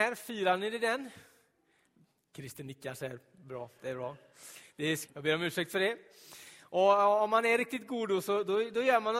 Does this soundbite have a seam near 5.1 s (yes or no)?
yes